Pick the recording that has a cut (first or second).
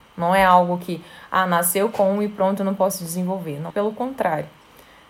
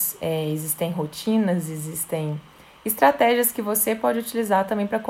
first